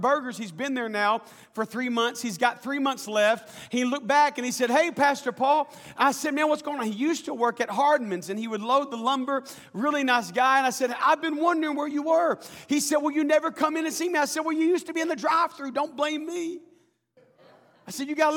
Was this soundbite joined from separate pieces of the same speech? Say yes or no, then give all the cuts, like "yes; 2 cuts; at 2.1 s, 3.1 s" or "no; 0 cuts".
no; 0 cuts